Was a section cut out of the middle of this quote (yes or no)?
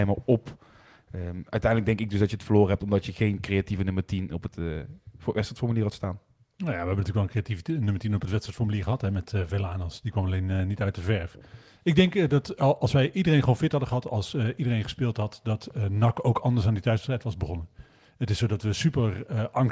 no